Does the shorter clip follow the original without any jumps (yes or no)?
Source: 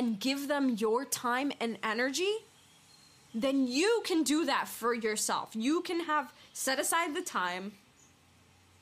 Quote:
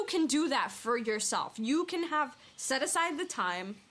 yes